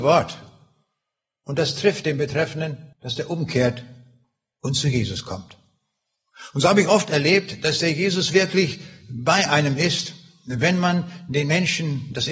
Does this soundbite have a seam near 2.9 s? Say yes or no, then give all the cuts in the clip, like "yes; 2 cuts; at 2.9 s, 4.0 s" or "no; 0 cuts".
yes; 1 cut; at 2.9 s